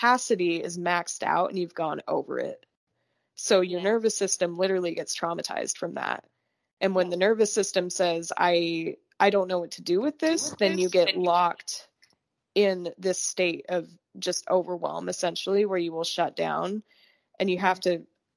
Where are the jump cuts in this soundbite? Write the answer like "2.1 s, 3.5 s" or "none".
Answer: none